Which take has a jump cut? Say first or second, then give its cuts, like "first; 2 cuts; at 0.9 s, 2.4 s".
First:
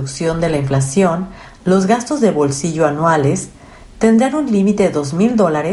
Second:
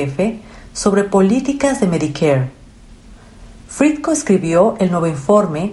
first; 1 cut; at 1.6 s